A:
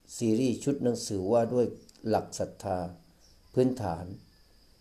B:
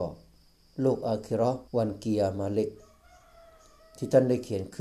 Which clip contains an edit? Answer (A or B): B